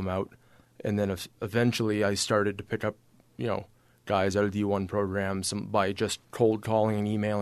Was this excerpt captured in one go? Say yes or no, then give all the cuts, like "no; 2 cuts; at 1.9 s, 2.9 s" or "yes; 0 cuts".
no; 1 cut; at 6.2 s